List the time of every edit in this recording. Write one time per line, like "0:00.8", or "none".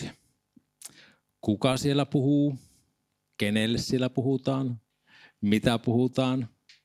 none